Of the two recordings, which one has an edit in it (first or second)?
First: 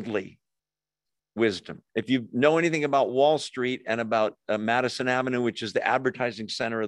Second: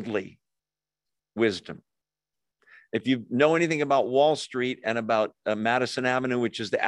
first